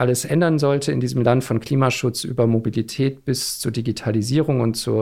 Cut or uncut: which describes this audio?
uncut